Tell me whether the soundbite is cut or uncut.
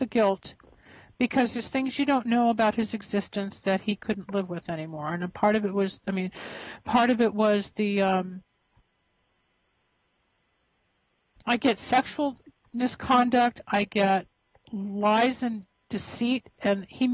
uncut